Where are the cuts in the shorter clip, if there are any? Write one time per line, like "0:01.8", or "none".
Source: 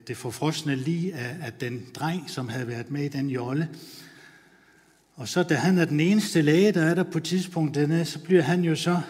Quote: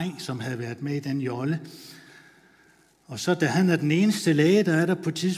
none